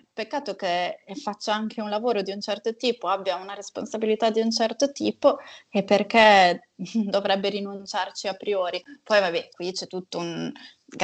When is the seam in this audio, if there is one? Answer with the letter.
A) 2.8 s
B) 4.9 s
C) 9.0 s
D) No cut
D